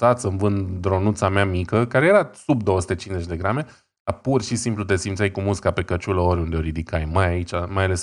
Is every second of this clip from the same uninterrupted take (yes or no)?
yes